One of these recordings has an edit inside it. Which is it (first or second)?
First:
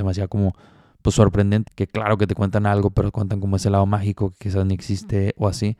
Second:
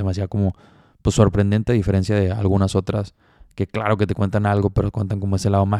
first